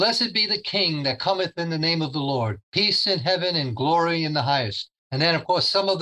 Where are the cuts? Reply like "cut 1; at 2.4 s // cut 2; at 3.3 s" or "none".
cut 1; at 5.0 s